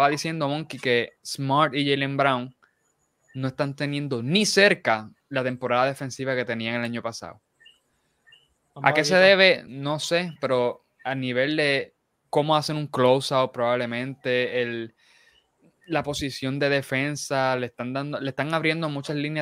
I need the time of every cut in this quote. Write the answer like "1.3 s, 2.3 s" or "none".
none